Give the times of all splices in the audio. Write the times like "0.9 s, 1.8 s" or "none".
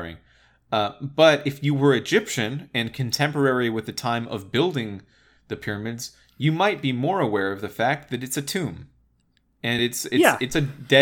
none